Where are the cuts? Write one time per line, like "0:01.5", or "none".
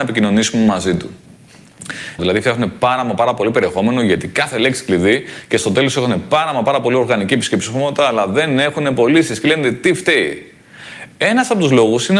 0:02.2

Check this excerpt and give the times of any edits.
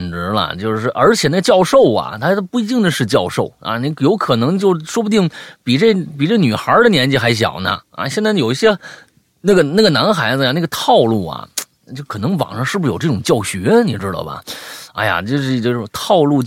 none

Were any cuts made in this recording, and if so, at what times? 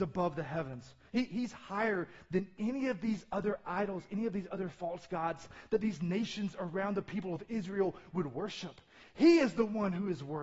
0:09.0

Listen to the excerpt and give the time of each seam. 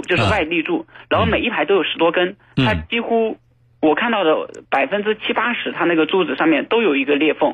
none

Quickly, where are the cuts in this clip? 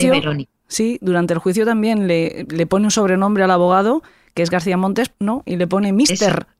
0:05.1

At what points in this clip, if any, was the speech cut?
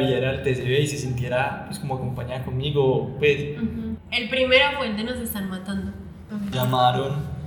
0:04.0
0:06.5

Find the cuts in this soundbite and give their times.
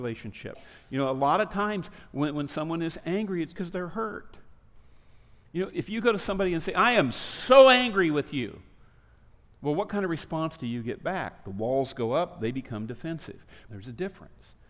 0:03.5
0:05.7
0:13.7

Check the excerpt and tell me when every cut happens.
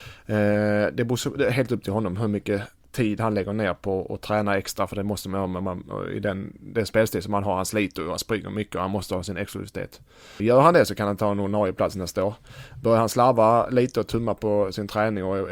0:10.4

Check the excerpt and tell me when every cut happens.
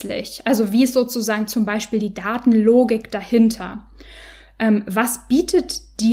none

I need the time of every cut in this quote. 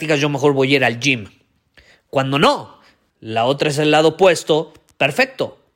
0:03.1

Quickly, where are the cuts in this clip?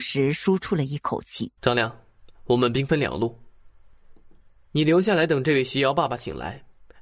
0:01.6

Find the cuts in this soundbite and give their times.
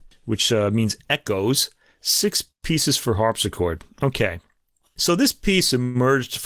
none

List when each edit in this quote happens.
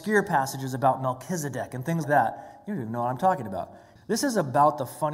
0:02.0
0:04.0

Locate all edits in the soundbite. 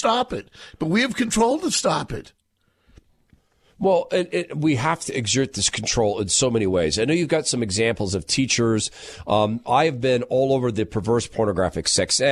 none

